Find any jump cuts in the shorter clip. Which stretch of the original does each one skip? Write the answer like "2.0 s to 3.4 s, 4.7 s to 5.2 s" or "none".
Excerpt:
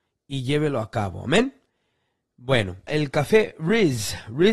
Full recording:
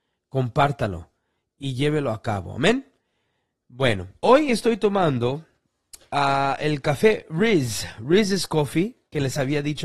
4.2 s to 6.6 s